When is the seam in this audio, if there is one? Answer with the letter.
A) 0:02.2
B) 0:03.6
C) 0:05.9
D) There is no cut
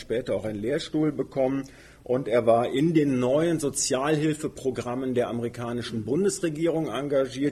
D